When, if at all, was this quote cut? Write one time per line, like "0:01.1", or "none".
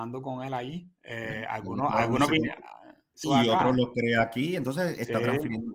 0:03.2